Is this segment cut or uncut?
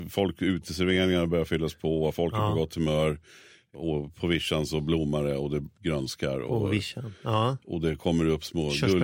uncut